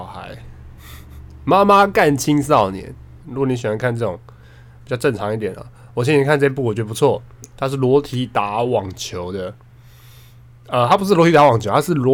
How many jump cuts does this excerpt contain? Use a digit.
1